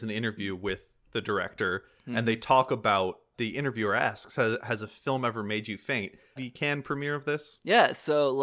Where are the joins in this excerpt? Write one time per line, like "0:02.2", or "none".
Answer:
0:03.3
0:06.4